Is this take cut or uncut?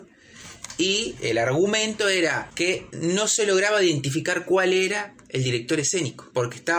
uncut